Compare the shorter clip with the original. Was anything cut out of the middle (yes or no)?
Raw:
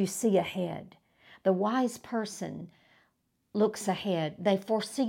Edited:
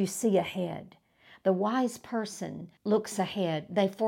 yes